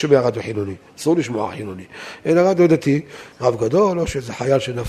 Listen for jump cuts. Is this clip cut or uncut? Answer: cut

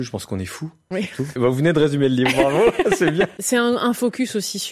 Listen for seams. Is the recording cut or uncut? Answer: cut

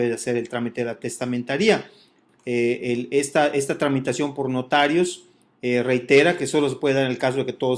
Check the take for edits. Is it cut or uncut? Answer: cut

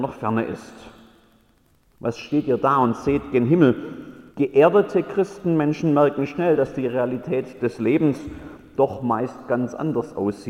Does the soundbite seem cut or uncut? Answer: cut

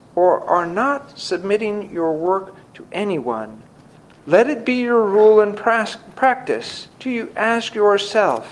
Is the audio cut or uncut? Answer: cut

